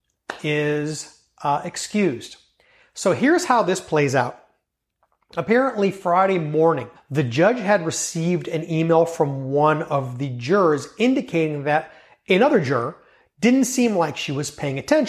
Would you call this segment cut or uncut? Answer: cut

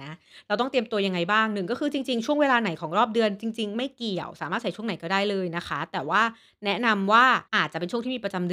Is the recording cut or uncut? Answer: cut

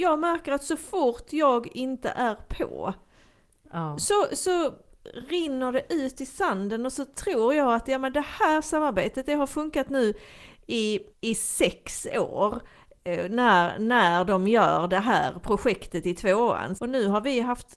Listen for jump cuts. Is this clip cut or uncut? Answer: cut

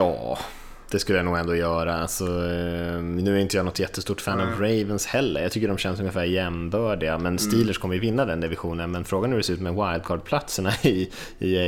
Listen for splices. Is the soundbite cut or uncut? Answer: uncut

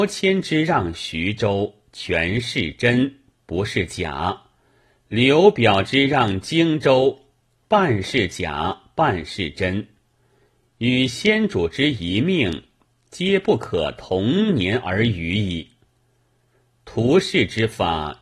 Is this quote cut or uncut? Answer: uncut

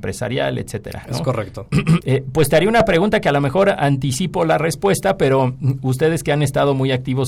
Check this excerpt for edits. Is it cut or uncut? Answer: cut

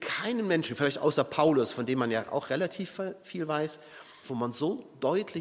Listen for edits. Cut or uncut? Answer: cut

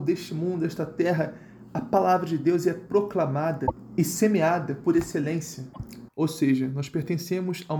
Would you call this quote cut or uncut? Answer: cut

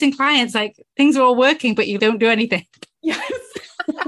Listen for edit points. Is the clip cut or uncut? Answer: cut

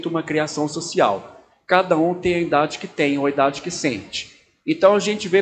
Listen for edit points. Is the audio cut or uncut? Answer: uncut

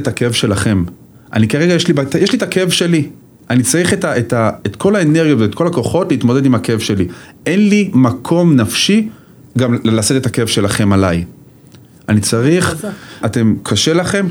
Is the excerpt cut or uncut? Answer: cut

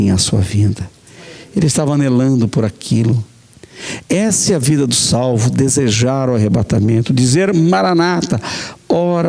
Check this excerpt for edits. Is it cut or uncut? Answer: uncut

